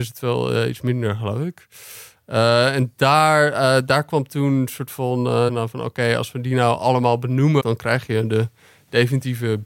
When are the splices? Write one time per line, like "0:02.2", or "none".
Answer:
0:05.5
0:07.6

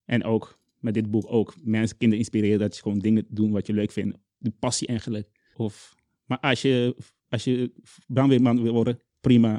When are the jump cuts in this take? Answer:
0:05.5

